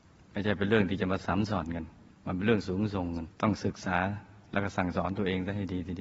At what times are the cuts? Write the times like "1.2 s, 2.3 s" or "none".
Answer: 3.3 s

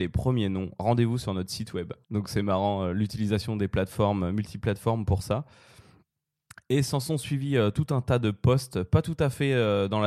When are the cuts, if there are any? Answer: 2.0 s

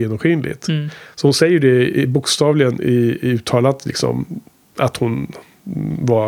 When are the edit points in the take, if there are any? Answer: none

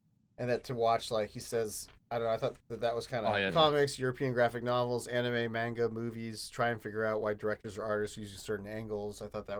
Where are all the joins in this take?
3.5 s

